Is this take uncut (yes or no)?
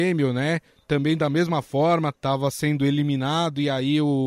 no